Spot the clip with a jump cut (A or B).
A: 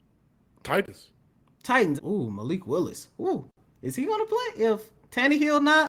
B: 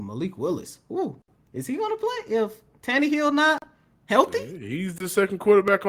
A